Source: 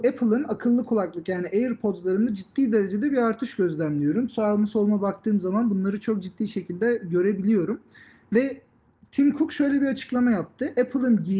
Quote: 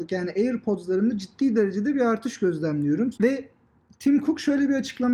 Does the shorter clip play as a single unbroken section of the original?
no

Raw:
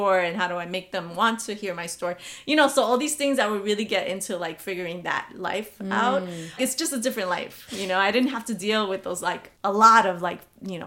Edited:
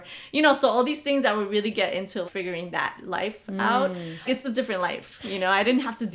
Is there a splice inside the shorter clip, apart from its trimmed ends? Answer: yes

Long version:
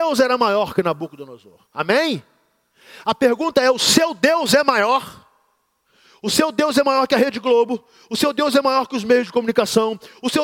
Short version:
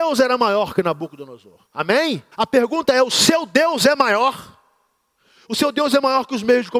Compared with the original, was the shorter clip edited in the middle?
yes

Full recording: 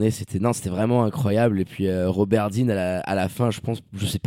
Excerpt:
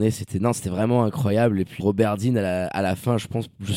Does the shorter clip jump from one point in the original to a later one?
yes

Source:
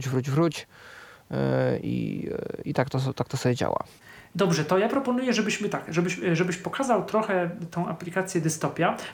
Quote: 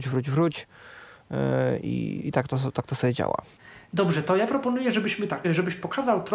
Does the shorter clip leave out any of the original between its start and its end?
yes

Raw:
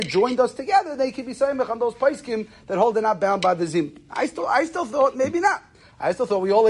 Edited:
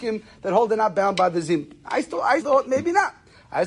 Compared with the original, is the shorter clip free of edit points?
no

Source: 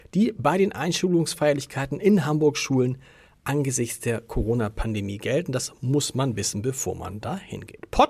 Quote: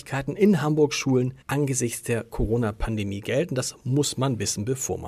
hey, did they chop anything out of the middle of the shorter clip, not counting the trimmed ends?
yes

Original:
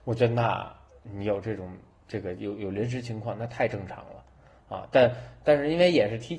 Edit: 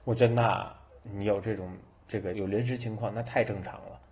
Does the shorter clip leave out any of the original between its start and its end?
yes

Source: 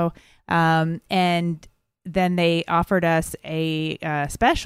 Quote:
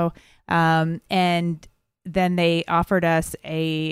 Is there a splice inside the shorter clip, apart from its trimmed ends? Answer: no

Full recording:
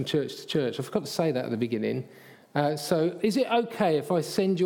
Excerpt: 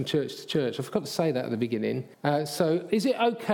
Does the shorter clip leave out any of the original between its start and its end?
yes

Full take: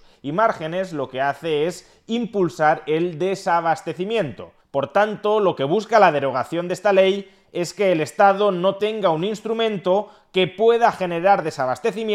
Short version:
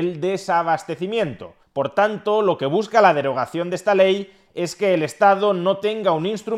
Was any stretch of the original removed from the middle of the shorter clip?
no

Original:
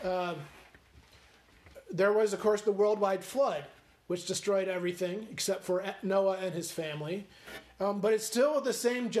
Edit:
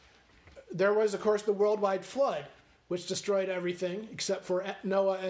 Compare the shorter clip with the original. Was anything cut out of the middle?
no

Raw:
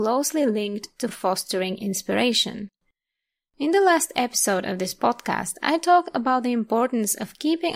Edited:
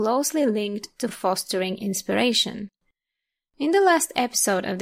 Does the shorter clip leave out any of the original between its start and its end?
no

